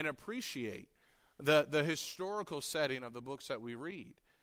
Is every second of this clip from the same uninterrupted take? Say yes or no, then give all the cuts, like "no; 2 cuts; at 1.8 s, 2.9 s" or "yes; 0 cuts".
yes; 0 cuts